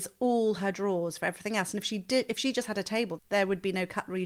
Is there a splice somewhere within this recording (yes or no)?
yes